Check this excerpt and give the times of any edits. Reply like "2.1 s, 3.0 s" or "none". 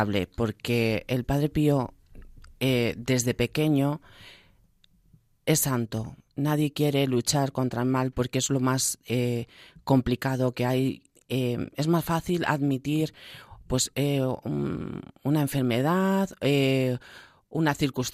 none